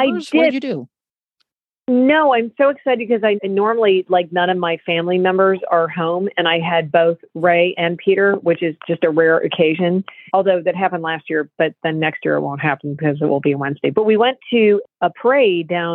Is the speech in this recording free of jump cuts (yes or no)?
no